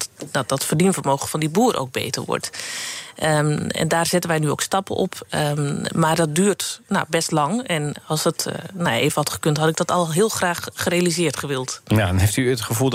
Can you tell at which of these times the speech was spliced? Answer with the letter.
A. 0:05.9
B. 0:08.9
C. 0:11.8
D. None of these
D